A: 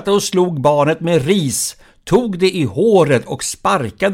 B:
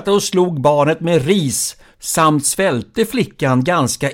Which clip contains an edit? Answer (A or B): B